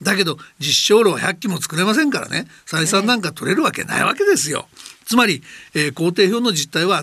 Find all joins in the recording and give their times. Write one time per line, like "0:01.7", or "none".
none